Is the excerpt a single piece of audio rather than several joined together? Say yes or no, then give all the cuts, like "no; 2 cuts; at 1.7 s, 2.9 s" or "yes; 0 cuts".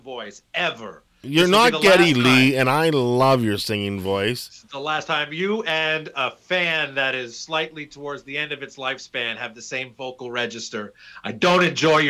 yes; 0 cuts